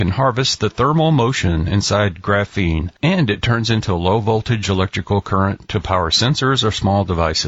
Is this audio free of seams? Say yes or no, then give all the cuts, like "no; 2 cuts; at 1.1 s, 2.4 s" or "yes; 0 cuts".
no; 1 cut; at 3.0 s